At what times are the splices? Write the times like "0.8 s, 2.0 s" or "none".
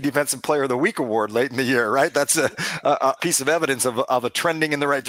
3.2 s

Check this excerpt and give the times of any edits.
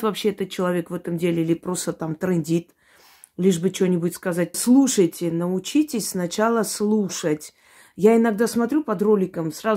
4.5 s

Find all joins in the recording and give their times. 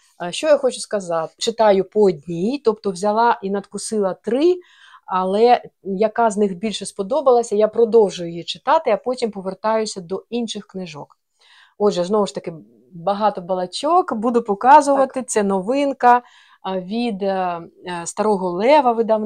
1.4 s

